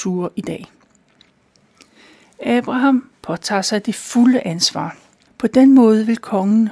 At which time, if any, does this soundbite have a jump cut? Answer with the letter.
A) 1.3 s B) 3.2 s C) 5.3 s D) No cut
C